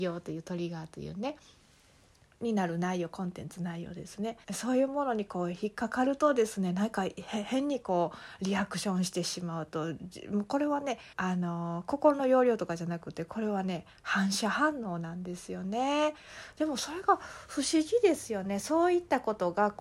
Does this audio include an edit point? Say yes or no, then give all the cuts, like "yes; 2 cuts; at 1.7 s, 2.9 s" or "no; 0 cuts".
yes; 2 cuts; at 4.4 s, 11.1 s